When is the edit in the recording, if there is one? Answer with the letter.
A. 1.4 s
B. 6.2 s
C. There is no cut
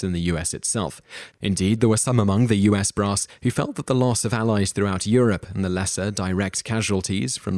A